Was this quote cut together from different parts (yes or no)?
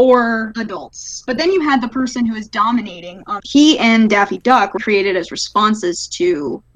yes